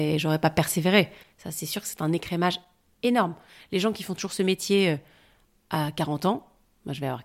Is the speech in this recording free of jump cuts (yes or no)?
yes